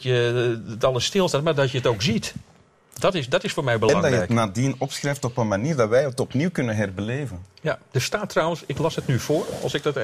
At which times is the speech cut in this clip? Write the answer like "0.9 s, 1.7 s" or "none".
none

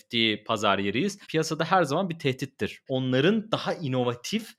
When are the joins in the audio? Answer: 1.2 s, 2.9 s

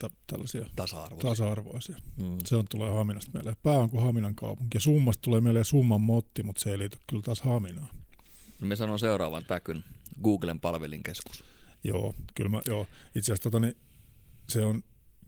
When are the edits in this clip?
none

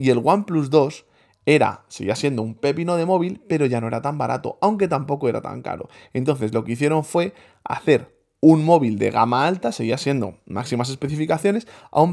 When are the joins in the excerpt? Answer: none

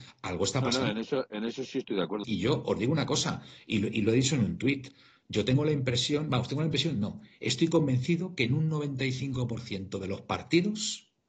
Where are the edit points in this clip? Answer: 2.2 s

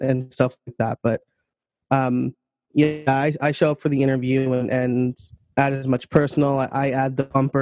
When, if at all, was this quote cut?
none

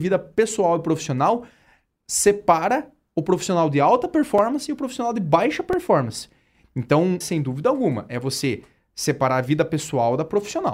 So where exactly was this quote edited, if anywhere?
7.2 s

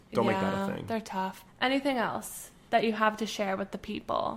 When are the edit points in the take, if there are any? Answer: 1.5 s

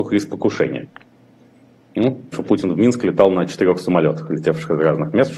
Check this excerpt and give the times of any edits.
2.3 s

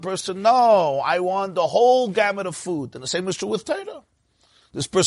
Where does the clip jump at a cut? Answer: none

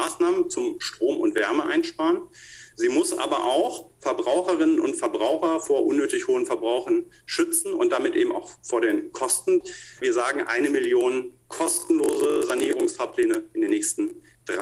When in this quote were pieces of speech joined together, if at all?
10.0 s

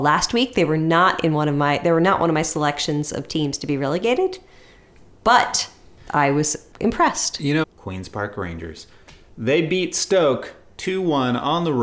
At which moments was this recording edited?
7.6 s

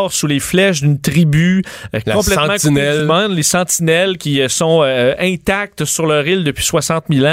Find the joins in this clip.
none

